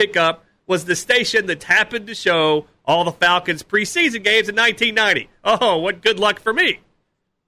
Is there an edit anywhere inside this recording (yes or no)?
yes